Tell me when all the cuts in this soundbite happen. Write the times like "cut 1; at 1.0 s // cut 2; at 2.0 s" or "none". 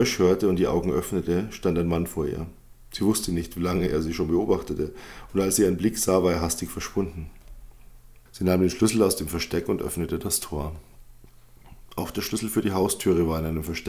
cut 1; at 8.3 s

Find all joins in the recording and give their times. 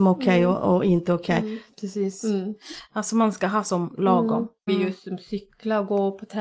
cut 1; at 1.7 s // cut 2; at 2.9 s // cut 3; at 4.7 s

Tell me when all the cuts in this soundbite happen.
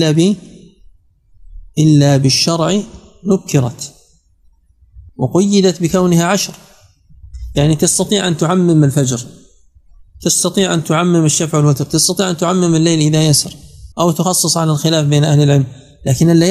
cut 1; at 5.1 s // cut 2; at 13.9 s

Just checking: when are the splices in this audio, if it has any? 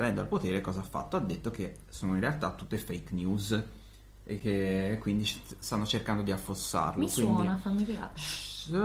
none

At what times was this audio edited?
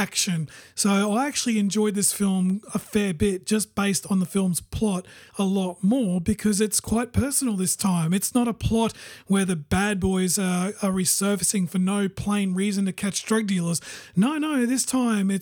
none

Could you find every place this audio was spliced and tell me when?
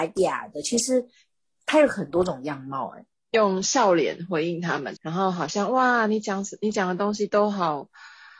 cut 1; at 3.1 s // cut 2; at 5.0 s

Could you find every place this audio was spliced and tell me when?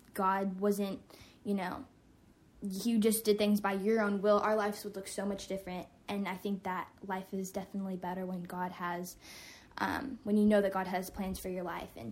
none

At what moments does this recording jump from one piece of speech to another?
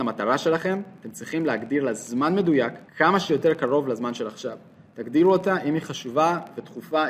cut 1; at 2.9 s

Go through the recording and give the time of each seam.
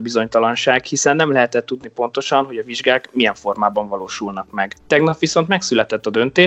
none

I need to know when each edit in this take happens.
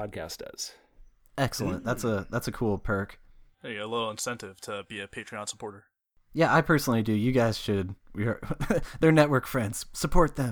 none

